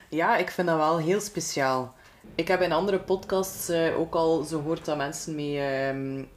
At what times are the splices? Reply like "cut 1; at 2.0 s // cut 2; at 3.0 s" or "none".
none